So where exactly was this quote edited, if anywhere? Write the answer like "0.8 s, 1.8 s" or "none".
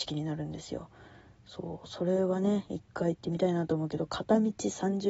none